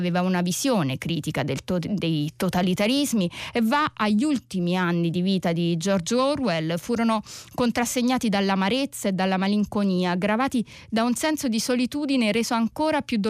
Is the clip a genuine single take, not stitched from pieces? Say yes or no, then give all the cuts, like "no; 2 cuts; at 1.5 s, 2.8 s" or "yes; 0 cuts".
yes; 0 cuts